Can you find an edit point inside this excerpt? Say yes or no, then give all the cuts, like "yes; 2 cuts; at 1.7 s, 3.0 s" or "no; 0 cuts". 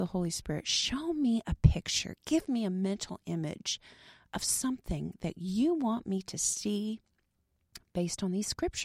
no; 0 cuts